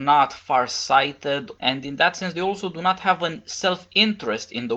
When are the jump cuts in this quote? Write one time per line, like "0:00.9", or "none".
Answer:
none